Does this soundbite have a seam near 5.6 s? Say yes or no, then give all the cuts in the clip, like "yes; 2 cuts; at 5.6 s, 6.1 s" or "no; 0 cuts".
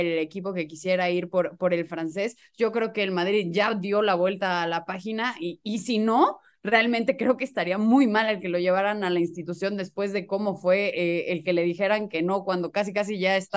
no; 0 cuts